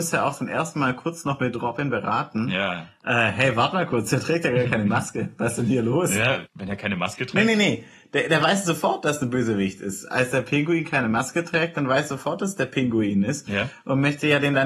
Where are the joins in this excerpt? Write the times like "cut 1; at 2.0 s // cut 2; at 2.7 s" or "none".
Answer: cut 1; at 6.5 s